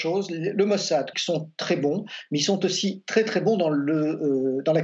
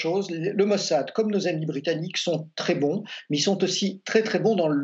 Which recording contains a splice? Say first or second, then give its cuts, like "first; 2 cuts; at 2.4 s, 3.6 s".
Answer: first; 1 cut; at 1.1 s